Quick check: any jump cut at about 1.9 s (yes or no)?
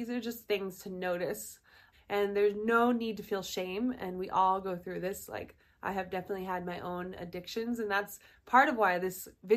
yes